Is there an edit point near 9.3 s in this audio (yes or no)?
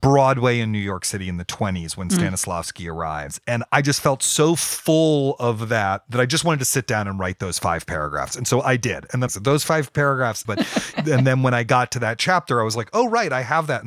yes